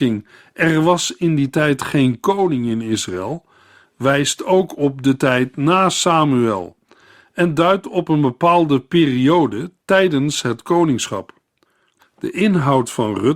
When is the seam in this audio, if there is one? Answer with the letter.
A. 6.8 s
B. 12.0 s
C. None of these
B